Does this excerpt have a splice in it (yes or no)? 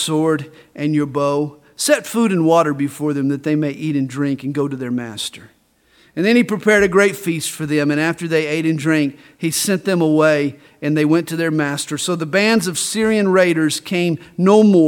no